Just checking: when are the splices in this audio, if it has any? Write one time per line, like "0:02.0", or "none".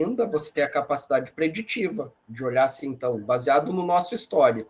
none